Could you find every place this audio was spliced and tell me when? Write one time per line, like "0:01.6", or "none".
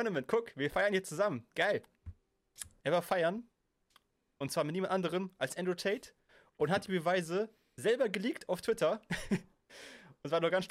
0:02.8